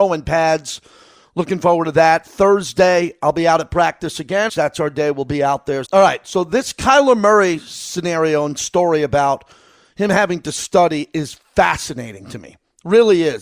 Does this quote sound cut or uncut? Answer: cut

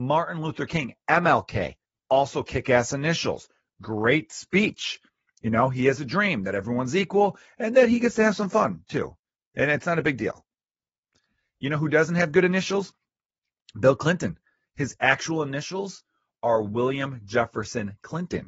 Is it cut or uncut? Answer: uncut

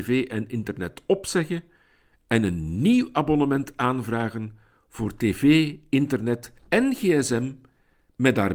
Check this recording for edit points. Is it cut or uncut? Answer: cut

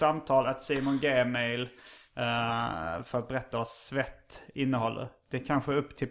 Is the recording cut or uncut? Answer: uncut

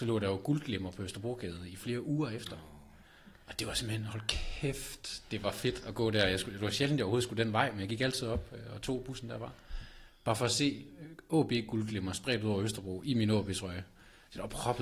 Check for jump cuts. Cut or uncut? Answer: uncut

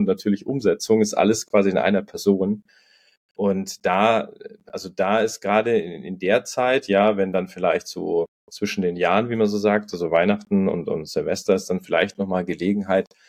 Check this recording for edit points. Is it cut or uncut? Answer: uncut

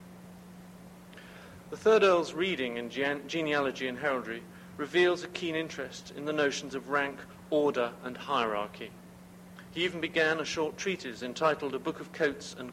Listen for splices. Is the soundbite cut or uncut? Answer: uncut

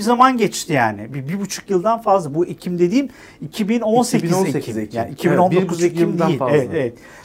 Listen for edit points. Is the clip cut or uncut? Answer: uncut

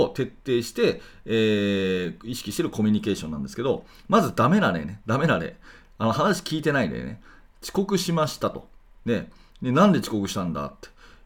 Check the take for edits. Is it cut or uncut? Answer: uncut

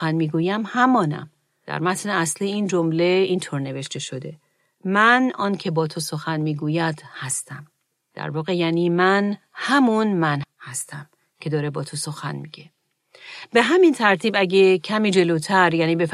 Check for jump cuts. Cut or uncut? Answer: cut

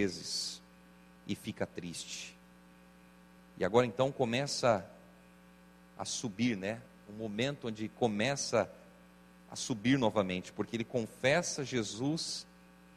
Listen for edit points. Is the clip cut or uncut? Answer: uncut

